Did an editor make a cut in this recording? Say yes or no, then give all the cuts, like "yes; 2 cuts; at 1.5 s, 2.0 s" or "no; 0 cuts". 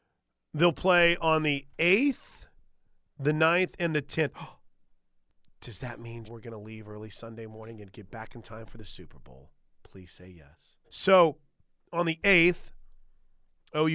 yes; 2 cuts; at 6.2 s, 10.8 s